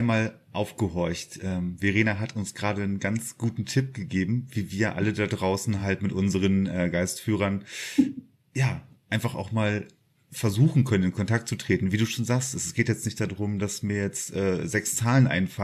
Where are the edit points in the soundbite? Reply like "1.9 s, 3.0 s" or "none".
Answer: none